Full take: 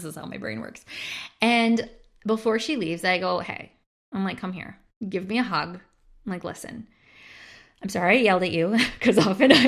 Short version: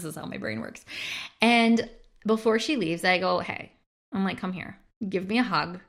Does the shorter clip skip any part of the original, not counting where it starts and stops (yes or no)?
no